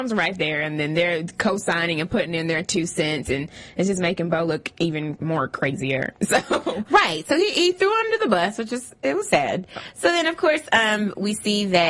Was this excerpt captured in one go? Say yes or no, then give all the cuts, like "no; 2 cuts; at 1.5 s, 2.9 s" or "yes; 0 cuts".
yes; 0 cuts